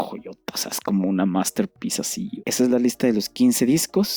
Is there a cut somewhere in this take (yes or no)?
yes